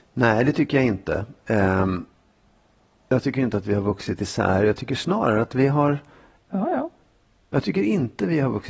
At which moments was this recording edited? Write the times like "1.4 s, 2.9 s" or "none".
6.4 s